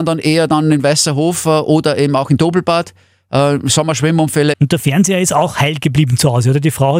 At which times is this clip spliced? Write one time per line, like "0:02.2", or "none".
0:04.5